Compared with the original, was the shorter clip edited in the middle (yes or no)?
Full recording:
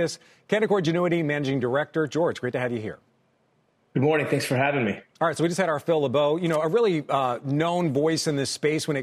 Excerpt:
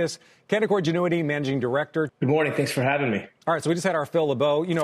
yes